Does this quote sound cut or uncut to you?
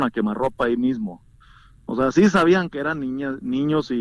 uncut